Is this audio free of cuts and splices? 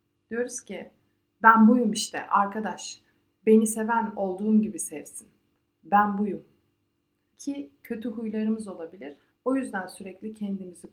no; 2 cuts; at 7.3 s, 9.3 s

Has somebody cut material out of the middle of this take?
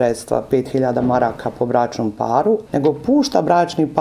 yes; 1 cut; at 2.7 s

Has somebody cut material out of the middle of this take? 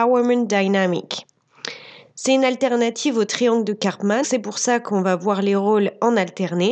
yes; 1 cut; at 4.2 s

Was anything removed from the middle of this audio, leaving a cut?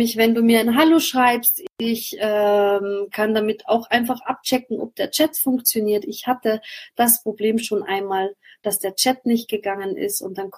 no; 0 cuts

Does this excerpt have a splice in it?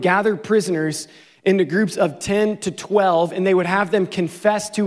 no; 0 cuts

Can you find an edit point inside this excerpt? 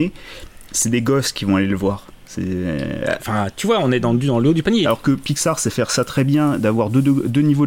yes; 2 cuts; at 3.2 s, 4.8 s

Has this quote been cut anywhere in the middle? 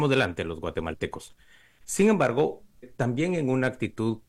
yes; 1 cut; at 2.8 s

